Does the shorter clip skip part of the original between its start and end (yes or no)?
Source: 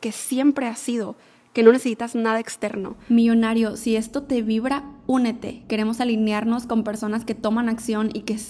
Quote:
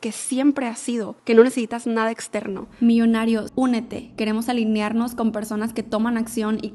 yes